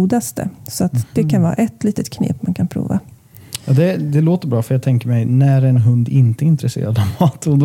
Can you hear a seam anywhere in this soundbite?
no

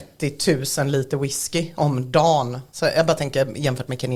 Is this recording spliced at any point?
no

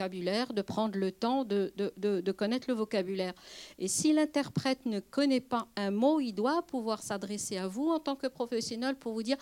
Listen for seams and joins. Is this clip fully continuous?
yes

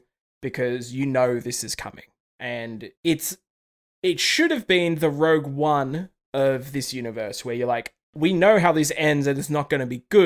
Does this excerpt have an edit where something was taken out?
yes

